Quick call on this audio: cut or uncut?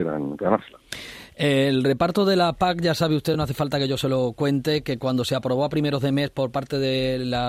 uncut